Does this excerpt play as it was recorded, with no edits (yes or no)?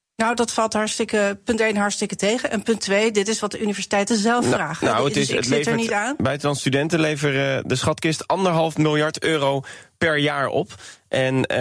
yes